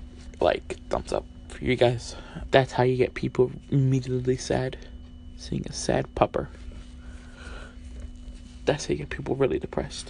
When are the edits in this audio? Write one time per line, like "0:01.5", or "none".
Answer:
0:02.5